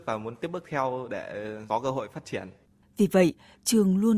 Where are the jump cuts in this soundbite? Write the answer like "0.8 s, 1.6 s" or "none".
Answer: 2.8 s